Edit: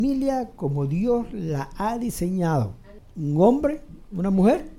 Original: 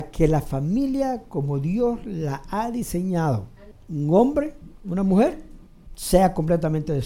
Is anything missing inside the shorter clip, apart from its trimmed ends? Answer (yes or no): no